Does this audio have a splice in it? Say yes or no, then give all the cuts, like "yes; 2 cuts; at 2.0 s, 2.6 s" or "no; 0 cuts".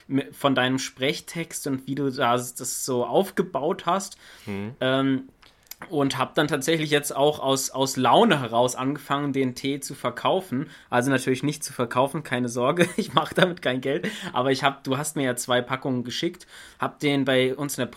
no; 0 cuts